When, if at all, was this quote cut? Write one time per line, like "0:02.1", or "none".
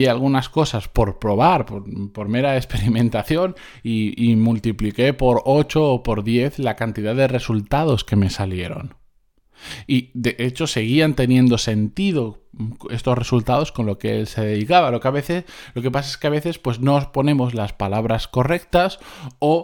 none